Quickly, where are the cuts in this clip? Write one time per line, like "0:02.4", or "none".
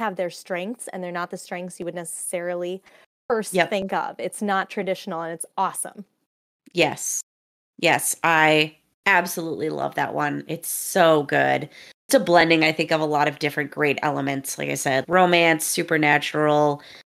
0:12.1
0:15.0